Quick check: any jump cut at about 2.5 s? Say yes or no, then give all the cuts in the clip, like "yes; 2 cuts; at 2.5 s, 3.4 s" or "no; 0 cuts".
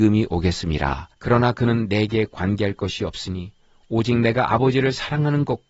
no; 1 cut; at 1.1 s